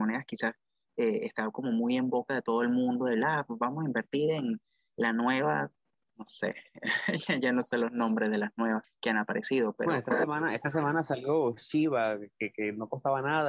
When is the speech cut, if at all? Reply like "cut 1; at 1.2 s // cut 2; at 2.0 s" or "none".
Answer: cut 1; at 8.8 s